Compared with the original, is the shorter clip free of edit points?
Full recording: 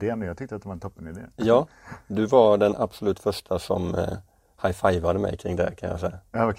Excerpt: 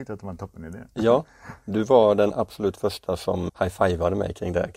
no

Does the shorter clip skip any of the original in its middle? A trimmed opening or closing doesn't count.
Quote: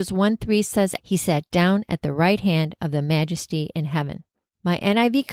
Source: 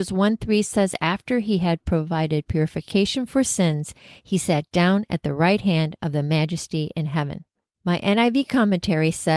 yes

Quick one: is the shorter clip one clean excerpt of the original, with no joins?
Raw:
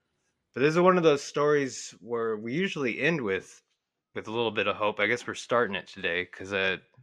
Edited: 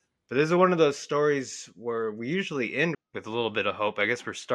no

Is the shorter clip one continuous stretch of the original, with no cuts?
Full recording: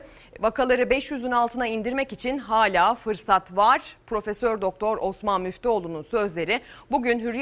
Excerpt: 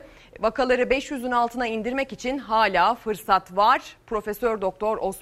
yes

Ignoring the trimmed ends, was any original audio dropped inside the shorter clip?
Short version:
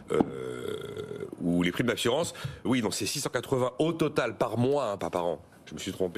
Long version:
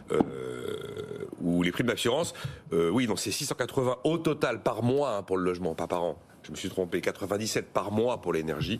yes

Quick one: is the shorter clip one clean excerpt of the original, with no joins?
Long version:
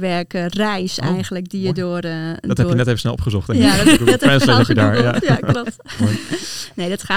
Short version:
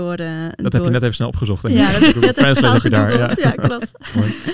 yes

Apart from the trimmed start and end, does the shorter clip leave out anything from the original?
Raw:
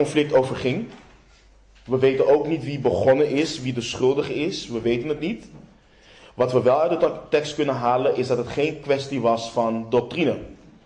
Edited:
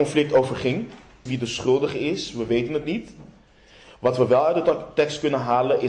yes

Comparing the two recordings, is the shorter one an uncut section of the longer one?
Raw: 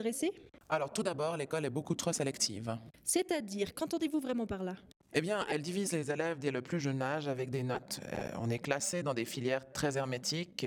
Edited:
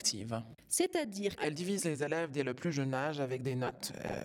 no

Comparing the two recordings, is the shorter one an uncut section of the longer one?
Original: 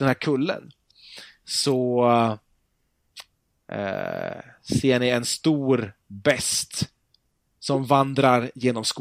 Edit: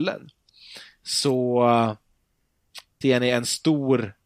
no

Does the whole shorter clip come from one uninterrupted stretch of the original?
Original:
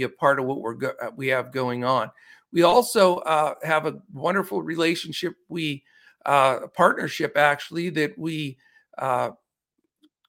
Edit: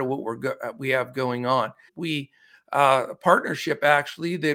no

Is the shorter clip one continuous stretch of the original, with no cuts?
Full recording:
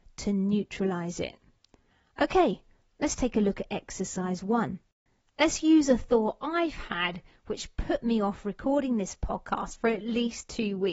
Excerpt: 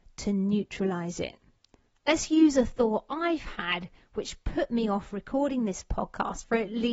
no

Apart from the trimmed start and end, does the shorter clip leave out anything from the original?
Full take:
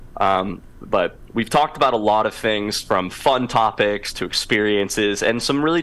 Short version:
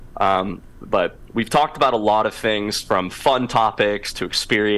no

